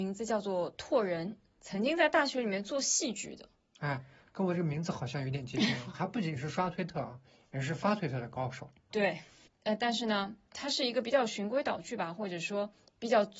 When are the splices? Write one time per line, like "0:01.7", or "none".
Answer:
0:05.9
0:08.9

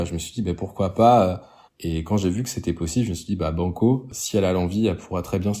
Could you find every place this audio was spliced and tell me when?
0:01.6

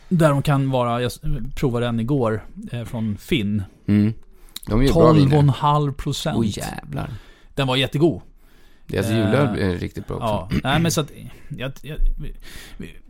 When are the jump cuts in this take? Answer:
none

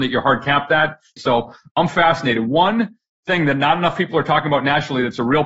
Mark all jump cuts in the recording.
0:01.2

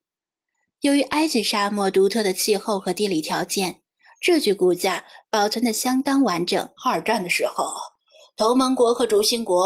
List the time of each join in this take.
0:06.8

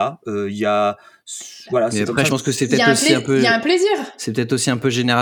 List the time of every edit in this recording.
0:02.3

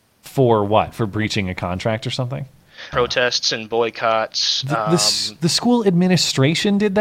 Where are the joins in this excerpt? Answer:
0:02.9

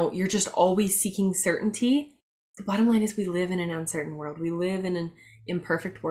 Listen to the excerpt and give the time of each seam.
none

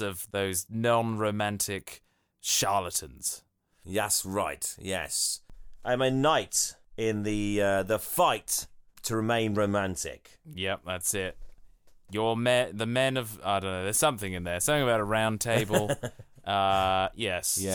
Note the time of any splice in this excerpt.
none

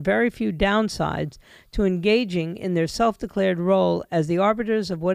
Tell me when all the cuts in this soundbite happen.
none

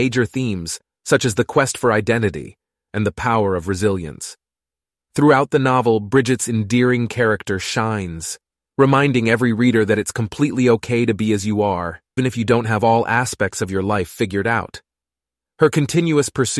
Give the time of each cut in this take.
0:02.9
0:05.0
0:12.2

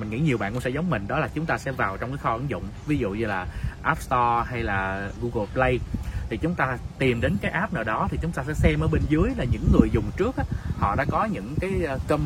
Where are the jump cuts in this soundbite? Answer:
0:05.2

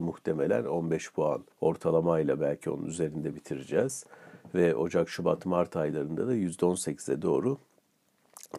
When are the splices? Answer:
0:01.5

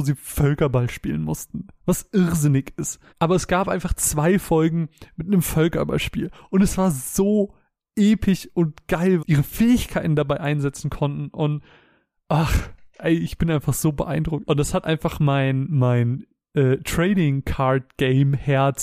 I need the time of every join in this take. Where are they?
0:03.1
0:09.2
0:14.4

